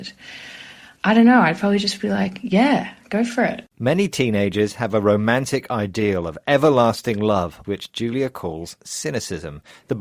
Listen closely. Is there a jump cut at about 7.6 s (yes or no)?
yes